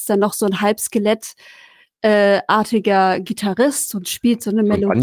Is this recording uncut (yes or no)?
yes